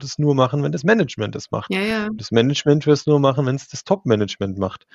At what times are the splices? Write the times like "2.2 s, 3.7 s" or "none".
none